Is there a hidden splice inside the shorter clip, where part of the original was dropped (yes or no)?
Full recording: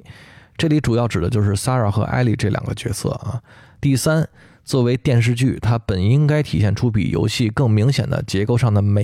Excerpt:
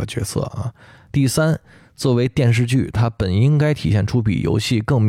no